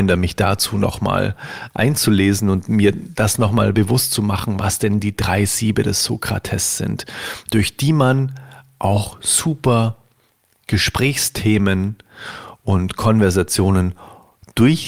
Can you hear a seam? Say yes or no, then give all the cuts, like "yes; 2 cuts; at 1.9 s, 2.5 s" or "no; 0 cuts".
no; 0 cuts